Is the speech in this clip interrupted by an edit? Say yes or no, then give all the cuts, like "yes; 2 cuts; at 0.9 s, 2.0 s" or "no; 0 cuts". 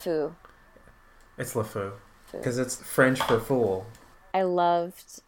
yes; 2 cuts; at 2.3 s, 4.2 s